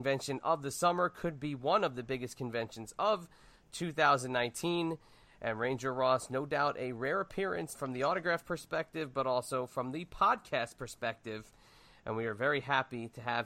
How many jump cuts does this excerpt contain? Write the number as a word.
one